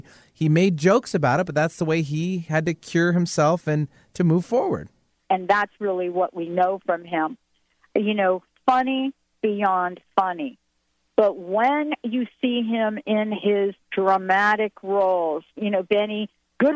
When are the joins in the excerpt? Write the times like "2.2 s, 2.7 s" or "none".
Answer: 5.2 s